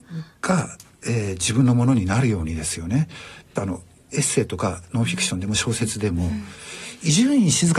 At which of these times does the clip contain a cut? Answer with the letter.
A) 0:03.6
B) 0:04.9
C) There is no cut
A